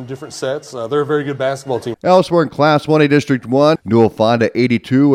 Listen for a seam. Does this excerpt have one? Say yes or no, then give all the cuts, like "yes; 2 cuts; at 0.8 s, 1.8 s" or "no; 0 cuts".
yes; 2 cuts; at 1.9 s, 3.8 s